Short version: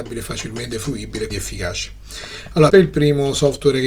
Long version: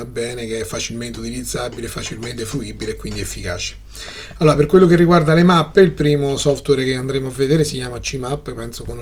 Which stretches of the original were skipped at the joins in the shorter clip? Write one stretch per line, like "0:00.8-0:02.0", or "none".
0:03.0-0:03.1
0:04.5-0:05.7